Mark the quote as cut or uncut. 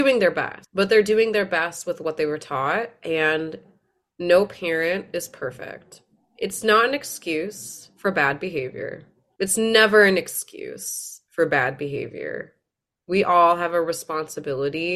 cut